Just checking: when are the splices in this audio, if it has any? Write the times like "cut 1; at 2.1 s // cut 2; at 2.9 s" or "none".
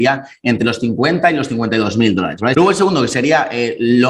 cut 1; at 2.5 s